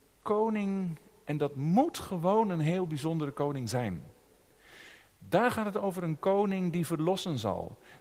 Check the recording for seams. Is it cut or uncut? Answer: uncut